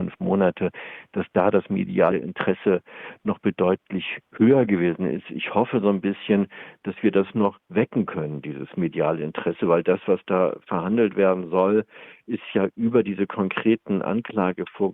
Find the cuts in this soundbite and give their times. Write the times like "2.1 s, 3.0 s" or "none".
none